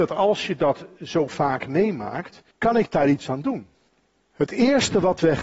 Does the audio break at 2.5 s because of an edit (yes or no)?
yes